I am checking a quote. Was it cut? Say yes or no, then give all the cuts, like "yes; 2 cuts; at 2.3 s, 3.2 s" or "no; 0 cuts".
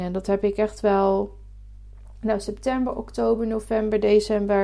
no; 0 cuts